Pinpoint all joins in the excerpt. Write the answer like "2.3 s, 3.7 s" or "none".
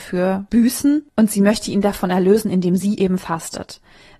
none